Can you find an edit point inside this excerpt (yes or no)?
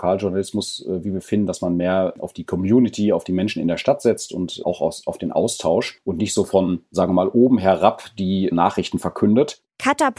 yes